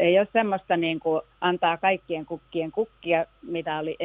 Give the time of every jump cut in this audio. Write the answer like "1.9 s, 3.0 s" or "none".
1.3 s